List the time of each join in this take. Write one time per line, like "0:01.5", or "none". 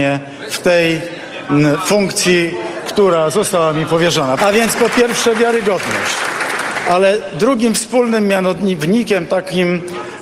0:04.4